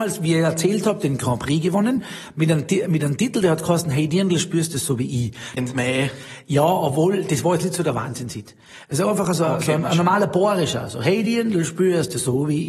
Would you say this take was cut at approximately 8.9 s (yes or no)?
no